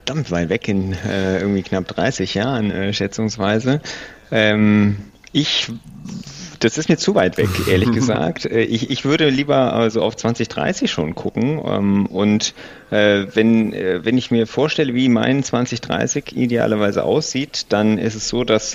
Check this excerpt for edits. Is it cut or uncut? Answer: uncut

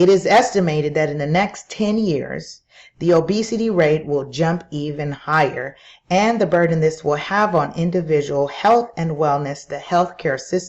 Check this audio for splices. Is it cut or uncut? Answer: uncut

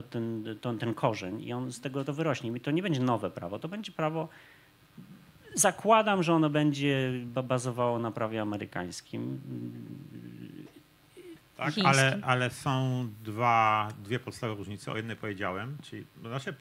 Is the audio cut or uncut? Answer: uncut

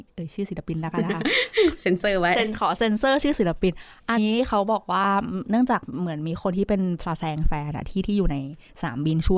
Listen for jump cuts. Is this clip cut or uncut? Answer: cut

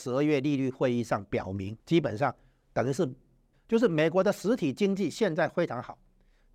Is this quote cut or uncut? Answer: cut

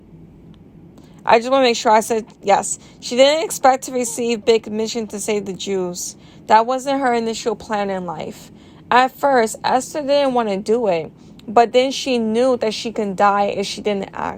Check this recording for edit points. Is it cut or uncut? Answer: uncut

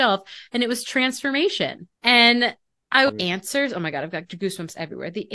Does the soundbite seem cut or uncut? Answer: cut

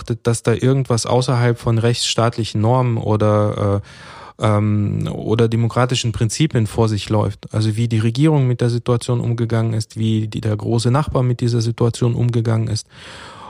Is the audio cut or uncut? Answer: uncut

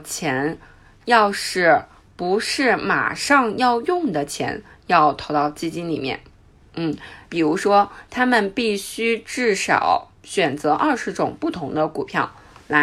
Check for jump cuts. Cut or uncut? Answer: cut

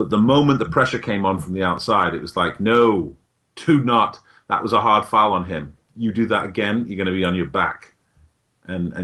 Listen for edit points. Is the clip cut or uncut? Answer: uncut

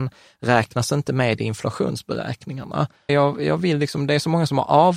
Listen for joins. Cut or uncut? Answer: cut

